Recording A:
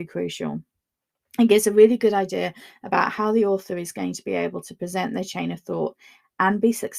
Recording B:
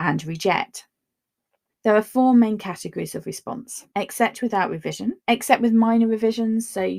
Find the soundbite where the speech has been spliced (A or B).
B